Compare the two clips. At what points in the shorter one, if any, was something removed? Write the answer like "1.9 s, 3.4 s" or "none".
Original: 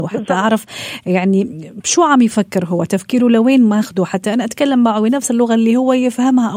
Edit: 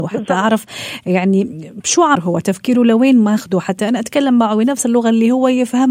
2.2 s